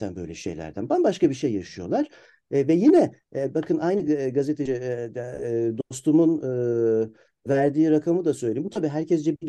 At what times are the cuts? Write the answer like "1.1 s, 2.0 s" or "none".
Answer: 7.5 s